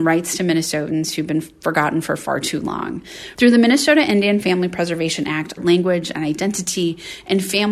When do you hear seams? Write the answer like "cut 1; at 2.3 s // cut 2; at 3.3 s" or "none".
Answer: cut 1; at 3.3 s // cut 2; at 5.6 s